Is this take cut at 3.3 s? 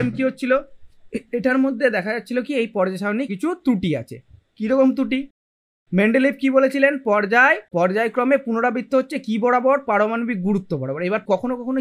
yes; 1 cut; at 3.3 s

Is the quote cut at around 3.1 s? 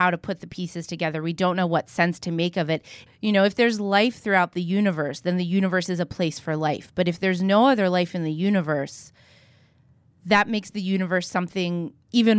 yes; 1 cut; at 3.1 s

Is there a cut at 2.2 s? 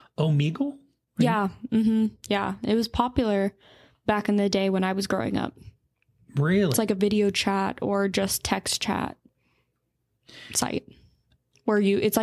no; 0 cuts

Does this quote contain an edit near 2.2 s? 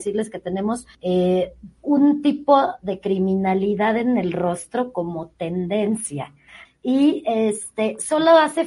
no; 2 cuts; at 0.9 s, 6.7 s

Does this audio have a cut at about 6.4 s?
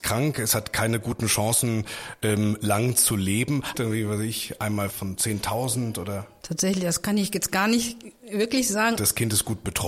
no; 3 cuts; at 3.7 s, 4.9 s, 9.0 s

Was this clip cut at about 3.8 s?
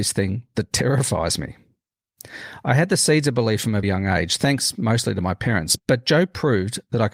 yes; 2 cuts; at 3.8 s, 5.8 s

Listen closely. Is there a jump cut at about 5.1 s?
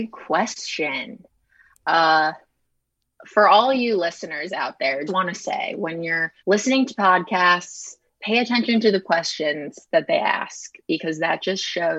yes; 2 cuts; at 5.1 s, 6.4 s

